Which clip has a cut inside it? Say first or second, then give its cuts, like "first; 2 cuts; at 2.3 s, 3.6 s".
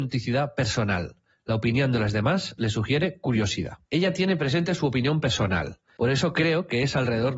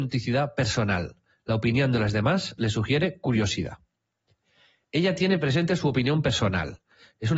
first; 2 cuts; at 3.8 s, 6.0 s